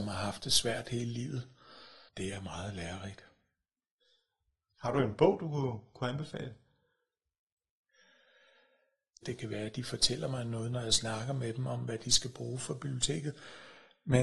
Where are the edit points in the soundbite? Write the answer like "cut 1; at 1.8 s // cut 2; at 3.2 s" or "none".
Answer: cut 1; at 2.1 s // cut 2; at 9.2 s